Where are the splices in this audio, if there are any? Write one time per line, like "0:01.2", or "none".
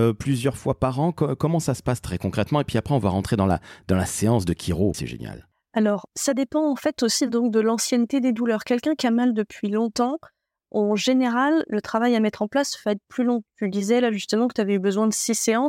0:04.9